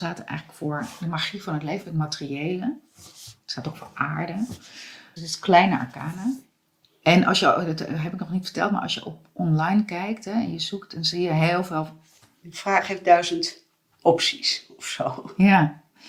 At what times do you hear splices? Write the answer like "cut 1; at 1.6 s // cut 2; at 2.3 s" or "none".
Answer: cut 1; at 1.8 s // cut 2; at 5.2 s // cut 3; at 12.2 s